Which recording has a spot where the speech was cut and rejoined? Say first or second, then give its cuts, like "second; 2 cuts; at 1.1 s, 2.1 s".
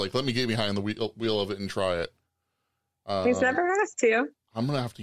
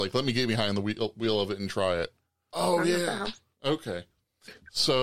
second; 1 cut; at 2.5 s